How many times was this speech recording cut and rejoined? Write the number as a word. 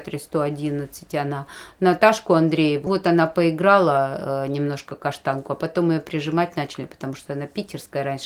one